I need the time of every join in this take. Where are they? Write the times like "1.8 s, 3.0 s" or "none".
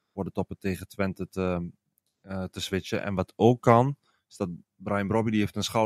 none